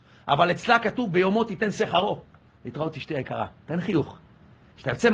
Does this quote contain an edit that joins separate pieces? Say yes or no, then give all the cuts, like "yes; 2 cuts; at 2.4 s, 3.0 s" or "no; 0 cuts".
yes; 1 cut; at 2.5 s